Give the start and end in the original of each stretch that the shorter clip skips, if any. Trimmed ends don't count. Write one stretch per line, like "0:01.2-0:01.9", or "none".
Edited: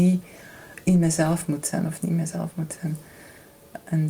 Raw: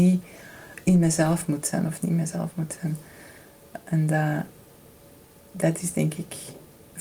none

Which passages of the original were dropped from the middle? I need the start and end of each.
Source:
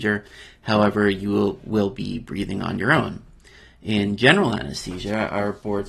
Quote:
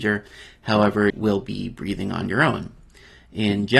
0:01.1-0:01.6

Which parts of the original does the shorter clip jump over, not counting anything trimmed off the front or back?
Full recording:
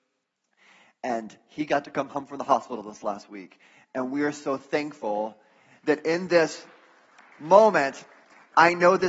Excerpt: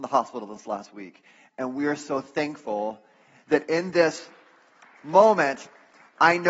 none

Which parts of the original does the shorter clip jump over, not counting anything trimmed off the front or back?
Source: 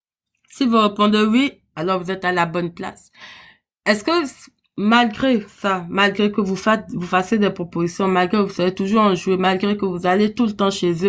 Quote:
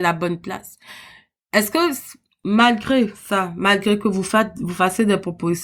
none

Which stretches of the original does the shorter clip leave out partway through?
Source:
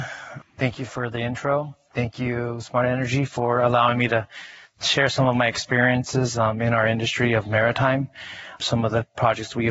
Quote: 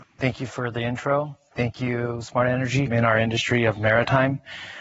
0:03.3-0:06.6

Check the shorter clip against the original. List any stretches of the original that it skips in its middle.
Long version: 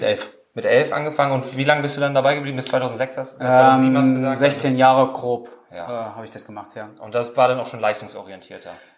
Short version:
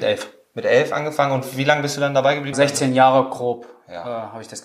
0:02.5-0:04.4

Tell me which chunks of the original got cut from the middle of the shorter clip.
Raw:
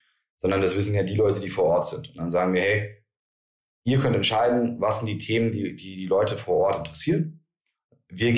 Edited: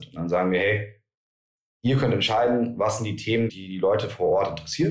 0:05.5-0:05.8

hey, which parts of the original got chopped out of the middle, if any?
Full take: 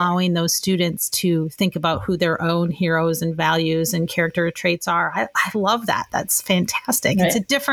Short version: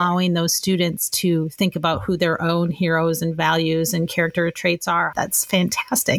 0:05.1-0:06.1

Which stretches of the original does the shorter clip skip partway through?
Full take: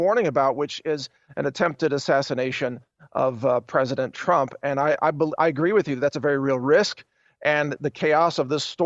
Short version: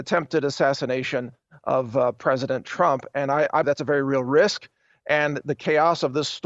0:05.1-0:06.0

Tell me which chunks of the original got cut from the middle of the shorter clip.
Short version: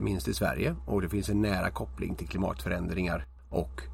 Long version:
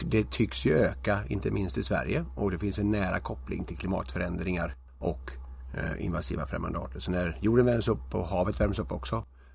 none

